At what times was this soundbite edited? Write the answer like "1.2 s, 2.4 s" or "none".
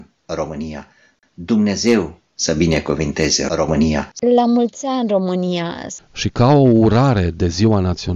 none

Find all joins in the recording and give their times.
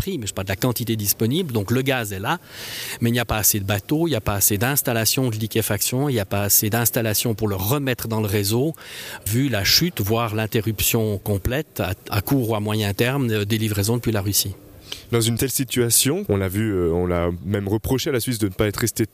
12.1 s, 16.3 s

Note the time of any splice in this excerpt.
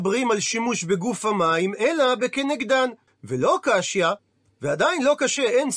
3.1 s

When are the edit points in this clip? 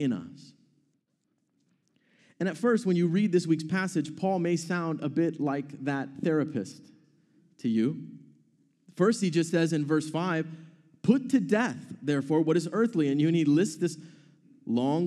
none

